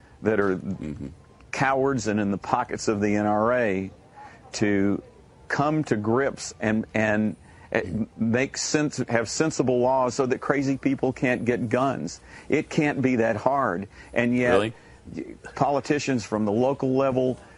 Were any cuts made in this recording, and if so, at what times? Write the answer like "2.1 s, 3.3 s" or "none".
9.1 s